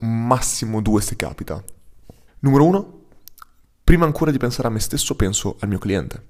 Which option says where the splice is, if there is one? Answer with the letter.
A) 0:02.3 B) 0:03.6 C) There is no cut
A